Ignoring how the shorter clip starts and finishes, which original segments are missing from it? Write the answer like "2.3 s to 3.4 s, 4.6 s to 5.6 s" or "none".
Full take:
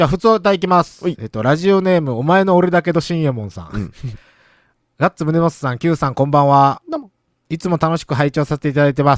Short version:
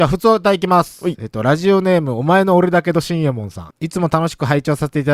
3.7 s to 7.4 s